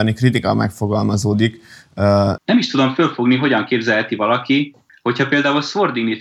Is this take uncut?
no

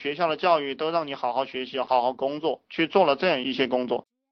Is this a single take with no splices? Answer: yes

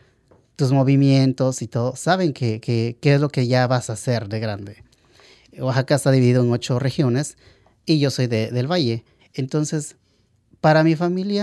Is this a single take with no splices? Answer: no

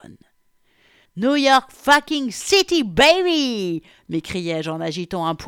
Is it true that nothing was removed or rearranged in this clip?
no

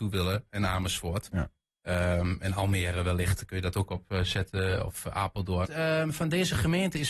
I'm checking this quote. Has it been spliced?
yes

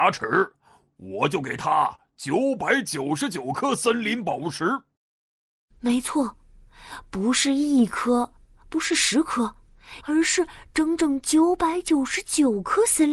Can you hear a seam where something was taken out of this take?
yes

